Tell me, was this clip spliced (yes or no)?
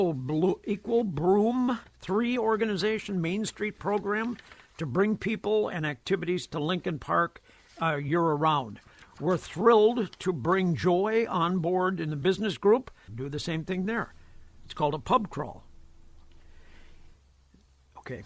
yes